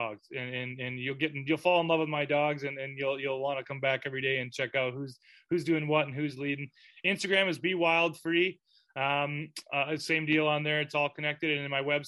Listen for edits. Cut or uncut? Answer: uncut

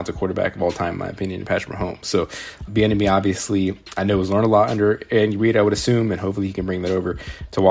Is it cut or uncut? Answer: cut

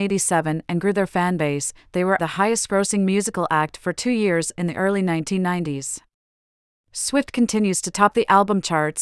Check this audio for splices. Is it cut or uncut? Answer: cut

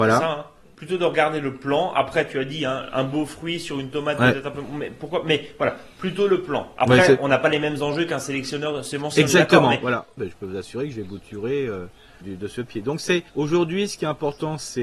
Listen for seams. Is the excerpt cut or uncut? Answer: cut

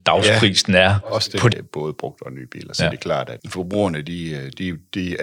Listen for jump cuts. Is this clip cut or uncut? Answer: cut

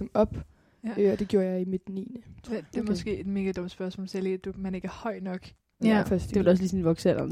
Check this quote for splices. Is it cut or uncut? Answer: cut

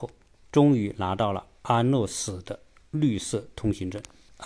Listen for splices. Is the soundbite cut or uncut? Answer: uncut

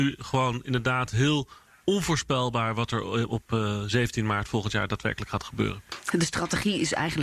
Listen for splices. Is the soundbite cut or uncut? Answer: cut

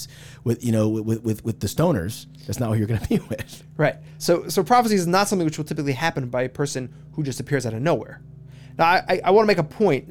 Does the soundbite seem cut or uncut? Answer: uncut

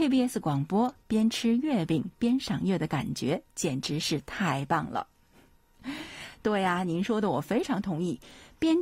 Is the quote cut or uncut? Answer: uncut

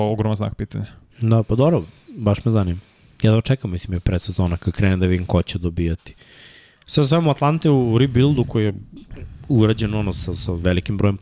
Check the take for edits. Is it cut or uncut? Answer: uncut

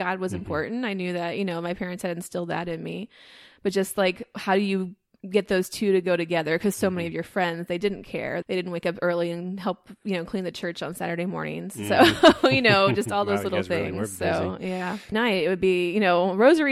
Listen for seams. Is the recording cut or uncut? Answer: cut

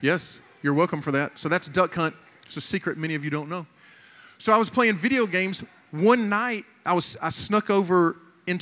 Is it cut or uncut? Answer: uncut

